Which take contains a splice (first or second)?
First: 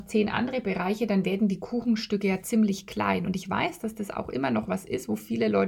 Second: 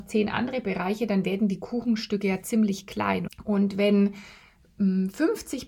second